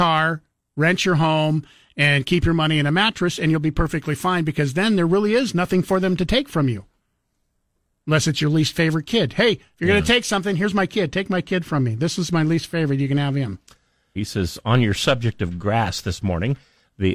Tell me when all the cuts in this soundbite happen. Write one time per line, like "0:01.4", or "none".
0:14.2